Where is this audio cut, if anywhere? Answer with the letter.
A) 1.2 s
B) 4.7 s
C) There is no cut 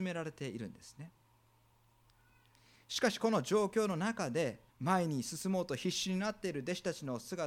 B